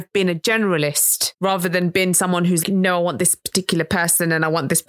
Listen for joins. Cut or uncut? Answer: cut